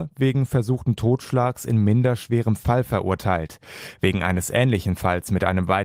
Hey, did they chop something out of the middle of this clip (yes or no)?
no